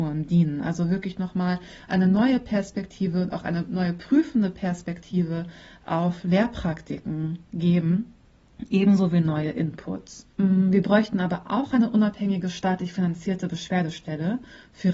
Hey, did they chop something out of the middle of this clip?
yes; 1 cut; at 10.3 s

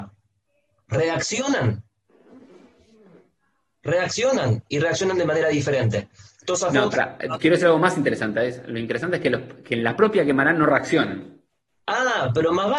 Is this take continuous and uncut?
yes; 0 cuts

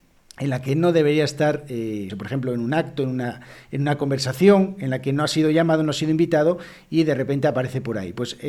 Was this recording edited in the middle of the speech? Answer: yes; 1 cut; at 2.1 s

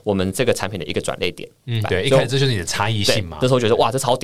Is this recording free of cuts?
no; 1 cut; at 1.8 s

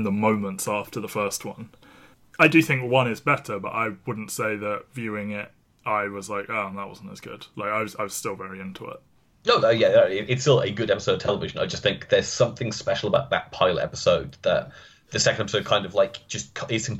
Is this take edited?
no; 0 cuts

